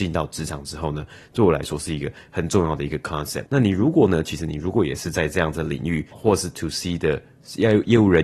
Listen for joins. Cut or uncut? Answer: cut